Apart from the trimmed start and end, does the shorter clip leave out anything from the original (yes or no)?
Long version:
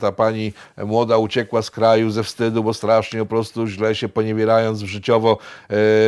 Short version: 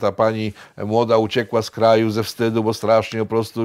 no